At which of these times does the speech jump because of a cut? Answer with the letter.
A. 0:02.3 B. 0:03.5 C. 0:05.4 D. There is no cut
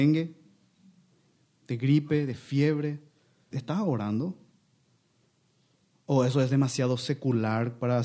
B